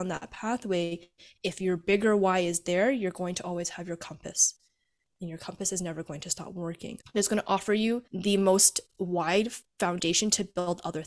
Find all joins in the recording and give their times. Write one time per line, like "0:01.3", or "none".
0:07.0
0:08.1